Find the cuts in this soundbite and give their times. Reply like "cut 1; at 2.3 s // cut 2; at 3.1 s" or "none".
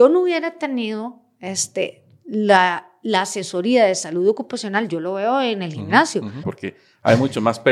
cut 1; at 6.4 s